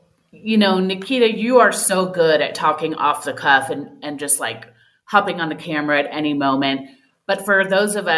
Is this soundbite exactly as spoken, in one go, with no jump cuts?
yes; 0 cuts

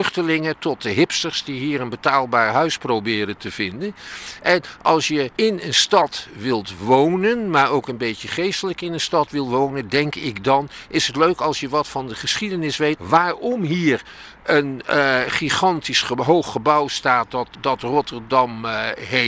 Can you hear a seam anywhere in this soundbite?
yes; 2 cuts; at 13.0 s, 17.5 s

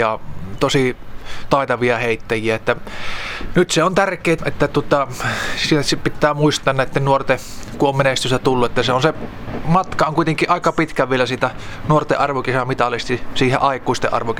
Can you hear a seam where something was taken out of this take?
yes; 1 cut; at 4.4 s

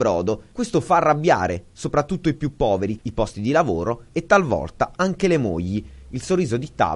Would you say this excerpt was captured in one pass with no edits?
no; 1 cut; at 3.0 s

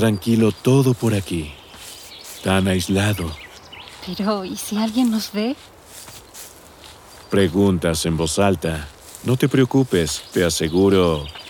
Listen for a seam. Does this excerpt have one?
no; 0 cuts

